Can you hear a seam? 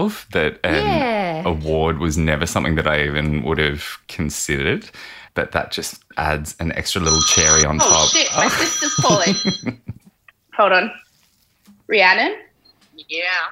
no; 0 cuts

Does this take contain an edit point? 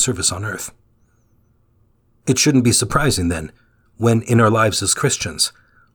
no; 0 cuts

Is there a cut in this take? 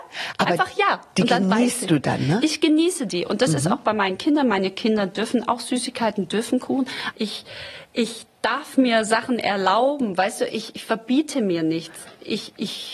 yes; 1 cut; at 7.1 s

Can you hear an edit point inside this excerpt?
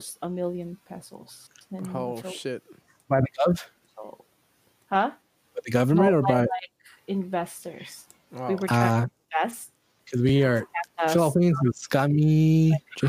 no; 0 cuts

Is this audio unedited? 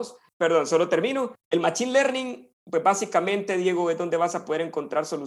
no; 1 cut; at 1.4 s

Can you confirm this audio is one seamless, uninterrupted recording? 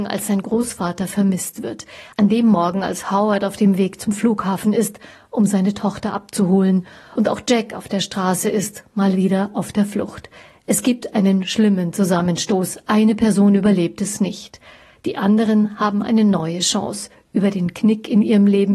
yes; 0 cuts

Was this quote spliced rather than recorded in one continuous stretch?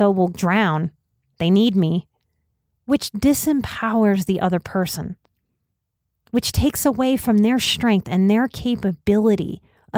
no; 0 cuts

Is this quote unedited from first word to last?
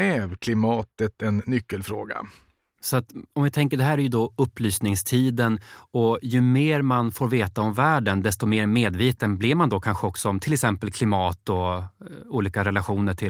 yes; 0 cuts

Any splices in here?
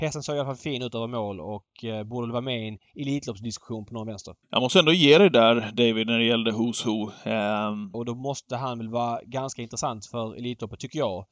yes; 2 cuts; at 4.4 s, 7.9 s

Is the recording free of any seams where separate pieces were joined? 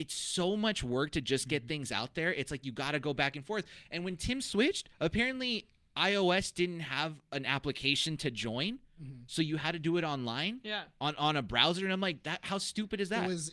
yes; 0 cuts

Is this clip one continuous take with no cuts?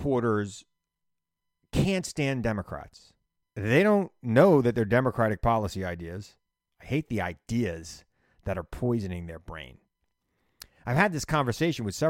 no; 2 cuts; at 3.4 s, 6.7 s

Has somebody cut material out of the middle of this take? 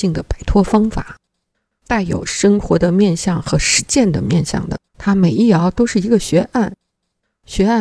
yes; 1 cut; at 4.9 s

